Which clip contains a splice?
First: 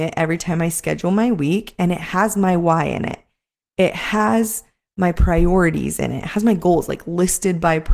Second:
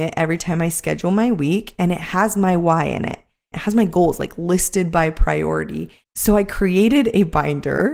second; 2 cuts; at 3.5 s, 6.0 s

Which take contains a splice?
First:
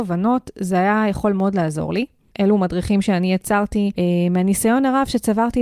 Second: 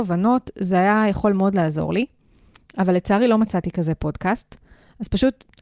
first; 1 cut; at 2.3 s

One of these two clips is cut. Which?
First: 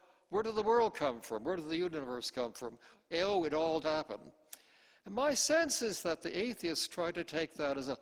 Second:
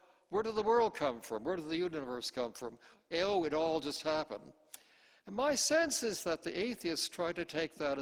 first; 1 cut; at 3.8 s

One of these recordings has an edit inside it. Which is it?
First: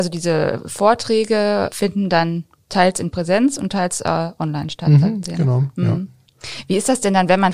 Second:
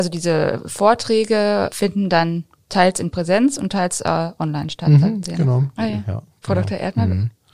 second; 1 cut; at 5.8 s

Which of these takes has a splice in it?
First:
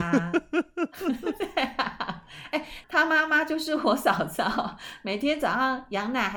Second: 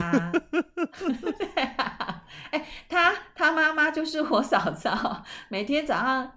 first; 1 cut; at 2.8 s

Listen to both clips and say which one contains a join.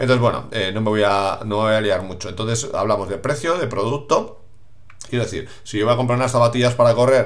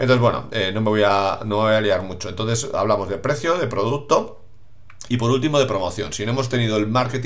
first; 1 cut; at 5.1 s

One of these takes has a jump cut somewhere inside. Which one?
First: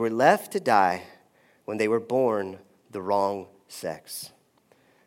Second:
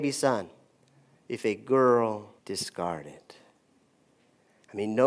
second; 2 cuts; at 1.1 s, 2.4 s

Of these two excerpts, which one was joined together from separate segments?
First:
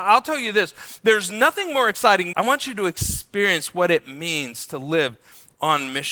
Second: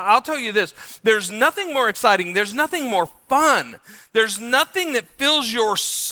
first; 1 cut; at 2.3 s

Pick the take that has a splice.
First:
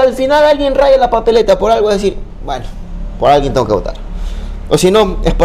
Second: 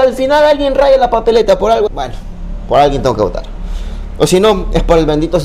second; 1 cut; at 1.9 s

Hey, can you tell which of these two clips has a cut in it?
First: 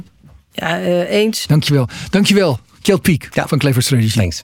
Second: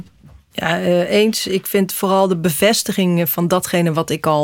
first; 1 cut; at 1.4 s

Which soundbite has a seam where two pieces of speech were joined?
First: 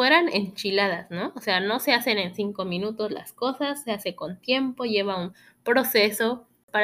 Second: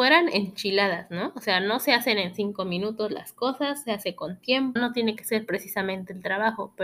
second; 1 cut; at 4.8 s

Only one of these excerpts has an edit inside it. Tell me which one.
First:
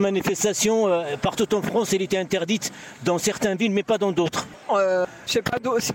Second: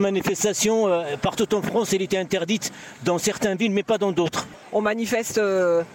first; 1 cut; at 4.7 s

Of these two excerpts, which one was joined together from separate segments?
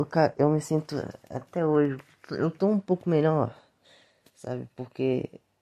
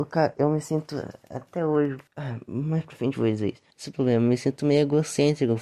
second; 2 cuts; at 2.1 s, 3.7 s

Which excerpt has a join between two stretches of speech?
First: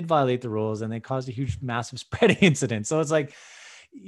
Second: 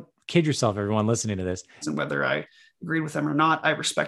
second; 1 cut; at 1.8 s

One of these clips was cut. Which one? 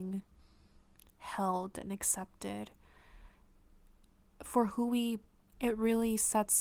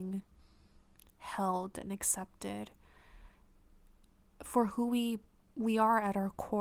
first; 1 cut; at 5.5 s

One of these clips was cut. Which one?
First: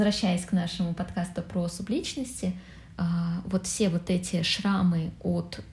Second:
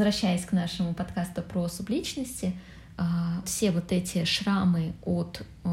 second; 1 cut; at 3.4 s

